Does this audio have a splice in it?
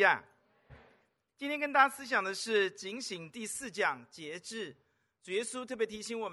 no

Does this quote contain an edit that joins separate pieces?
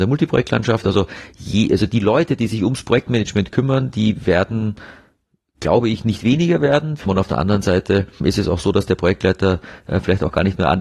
yes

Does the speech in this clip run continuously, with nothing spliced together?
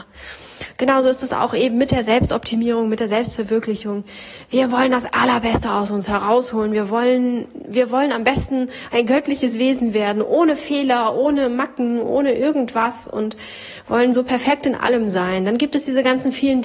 yes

